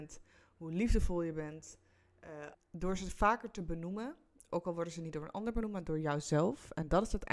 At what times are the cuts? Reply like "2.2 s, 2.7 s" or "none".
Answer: 2.5 s